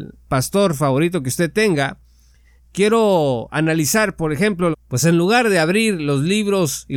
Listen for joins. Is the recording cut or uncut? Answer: cut